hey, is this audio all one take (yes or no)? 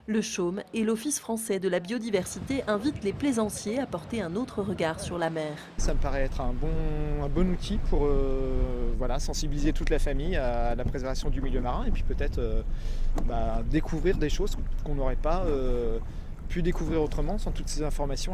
yes